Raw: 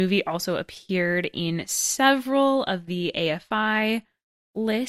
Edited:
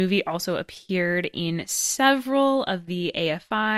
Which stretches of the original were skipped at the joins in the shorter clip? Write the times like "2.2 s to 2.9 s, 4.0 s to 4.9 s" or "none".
none